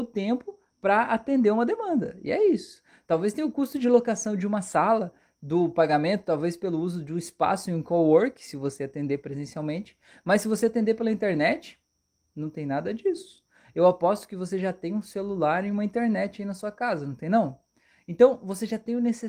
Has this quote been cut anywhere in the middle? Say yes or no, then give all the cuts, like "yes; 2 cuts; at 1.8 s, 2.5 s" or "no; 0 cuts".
no; 0 cuts